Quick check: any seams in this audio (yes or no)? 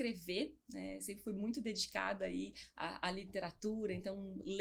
no